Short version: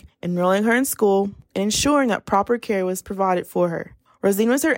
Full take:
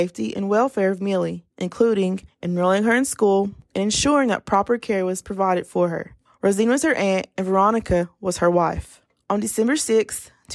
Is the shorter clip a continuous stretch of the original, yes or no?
yes